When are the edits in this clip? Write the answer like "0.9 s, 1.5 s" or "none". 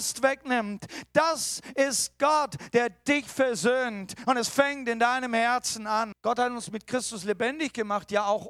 6.1 s

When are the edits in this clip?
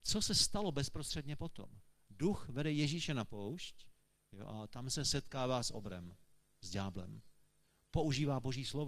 none

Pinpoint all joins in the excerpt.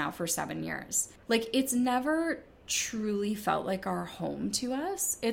1.2 s

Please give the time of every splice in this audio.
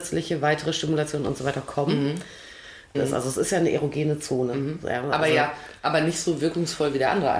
2.9 s

